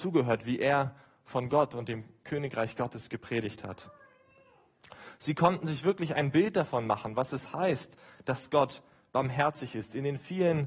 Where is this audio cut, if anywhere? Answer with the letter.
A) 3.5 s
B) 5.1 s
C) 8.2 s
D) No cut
D